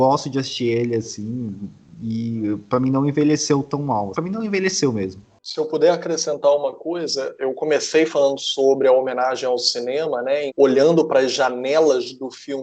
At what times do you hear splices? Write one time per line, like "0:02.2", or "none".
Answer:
0:04.1
0:10.5